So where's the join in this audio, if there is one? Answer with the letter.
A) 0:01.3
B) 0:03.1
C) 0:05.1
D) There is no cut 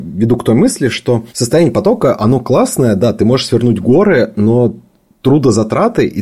A